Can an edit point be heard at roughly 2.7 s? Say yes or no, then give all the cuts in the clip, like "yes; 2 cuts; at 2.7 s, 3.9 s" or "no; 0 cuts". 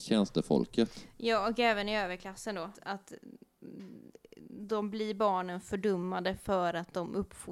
yes; 1 cut; at 2.7 s